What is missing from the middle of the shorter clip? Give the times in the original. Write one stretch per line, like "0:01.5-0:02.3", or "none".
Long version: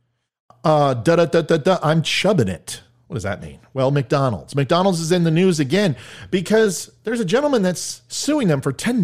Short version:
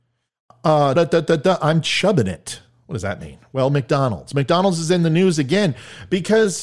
0:00.9-0:01.2